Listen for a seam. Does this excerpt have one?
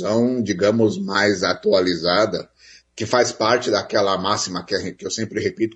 no; 0 cuts

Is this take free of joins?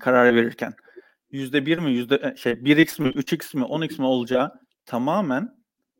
yes; 0 cuts

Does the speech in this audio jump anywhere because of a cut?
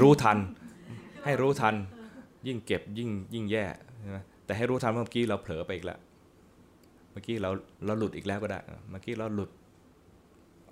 yes; 1 cut; at 7.7 s

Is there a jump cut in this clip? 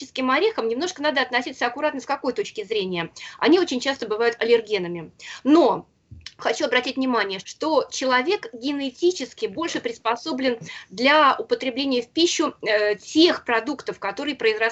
yes; 2 cuts; at 5.4 s, 7.4 s

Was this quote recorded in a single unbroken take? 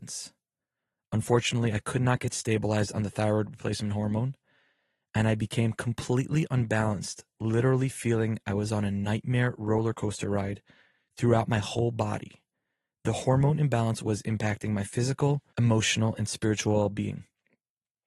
no; 1 cut; at 15.5 s

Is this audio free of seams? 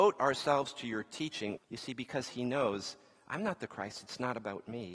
no; 1 cut; at 1.6 s

